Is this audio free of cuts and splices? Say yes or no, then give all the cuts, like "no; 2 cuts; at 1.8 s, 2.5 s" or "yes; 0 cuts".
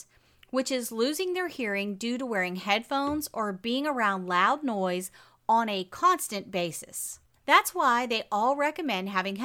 no; 1 cut; at 7.4 s